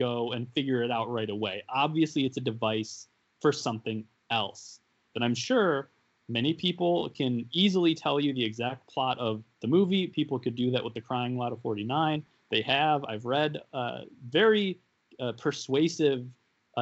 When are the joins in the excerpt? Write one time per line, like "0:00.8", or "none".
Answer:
0:05.1

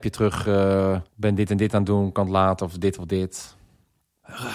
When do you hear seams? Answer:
0:01.1

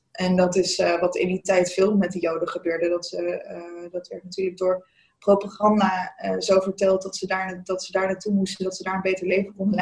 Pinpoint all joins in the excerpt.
none

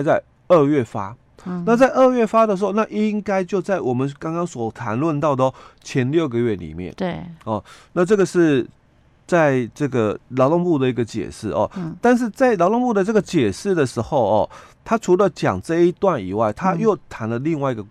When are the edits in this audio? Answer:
none

